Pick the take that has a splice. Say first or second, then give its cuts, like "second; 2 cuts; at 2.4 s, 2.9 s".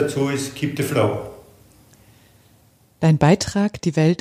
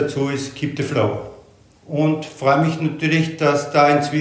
second; 1 cut; at 1.8 s